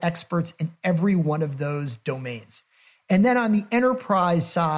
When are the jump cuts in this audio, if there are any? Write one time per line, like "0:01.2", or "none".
none